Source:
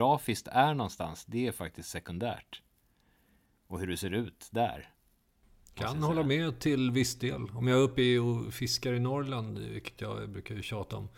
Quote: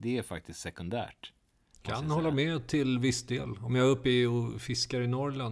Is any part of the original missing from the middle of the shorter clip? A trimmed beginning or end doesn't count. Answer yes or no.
yes